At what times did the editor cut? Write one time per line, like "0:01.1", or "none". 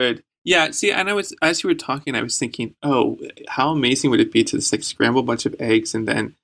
none